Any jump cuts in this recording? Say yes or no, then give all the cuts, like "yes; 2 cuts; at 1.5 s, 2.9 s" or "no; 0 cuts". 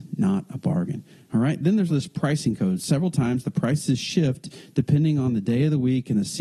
yes; 1 cut; at 1.9 s